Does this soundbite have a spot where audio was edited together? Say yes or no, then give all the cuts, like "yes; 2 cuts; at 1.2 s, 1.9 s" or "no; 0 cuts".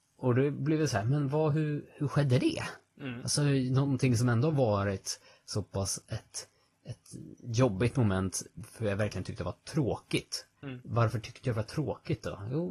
no; 0 cuts